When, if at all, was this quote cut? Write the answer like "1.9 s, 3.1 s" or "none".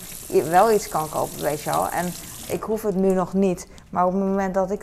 2.5 s